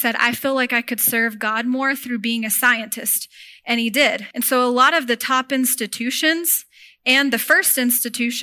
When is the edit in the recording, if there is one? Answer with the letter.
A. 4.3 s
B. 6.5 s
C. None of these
A